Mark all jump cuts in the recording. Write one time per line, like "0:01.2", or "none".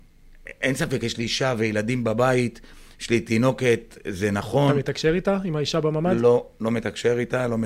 none